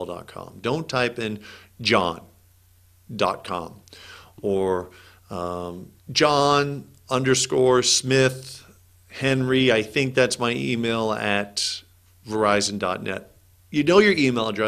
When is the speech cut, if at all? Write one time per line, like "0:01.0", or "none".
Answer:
0:06.0